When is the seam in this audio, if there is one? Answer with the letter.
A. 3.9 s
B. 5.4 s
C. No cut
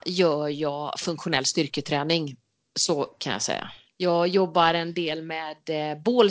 A